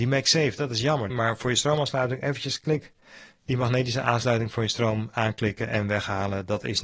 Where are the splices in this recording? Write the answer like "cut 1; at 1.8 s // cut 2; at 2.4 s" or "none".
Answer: cut 1; at 1.1 s